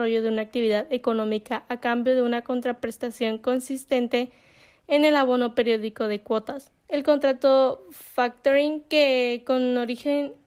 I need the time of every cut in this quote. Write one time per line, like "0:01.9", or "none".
0:06.8